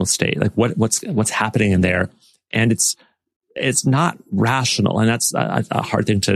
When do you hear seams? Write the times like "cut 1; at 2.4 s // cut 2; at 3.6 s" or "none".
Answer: none